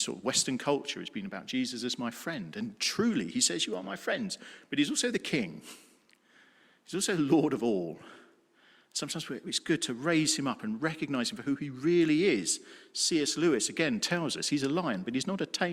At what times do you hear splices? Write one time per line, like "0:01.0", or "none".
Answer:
none